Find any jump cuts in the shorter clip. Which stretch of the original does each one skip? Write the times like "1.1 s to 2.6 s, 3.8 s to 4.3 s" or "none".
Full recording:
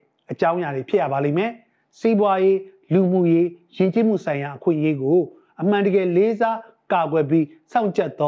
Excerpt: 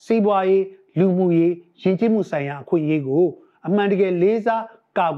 none